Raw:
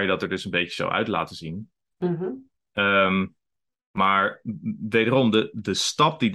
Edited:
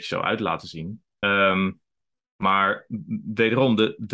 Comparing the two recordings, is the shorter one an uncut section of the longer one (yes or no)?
no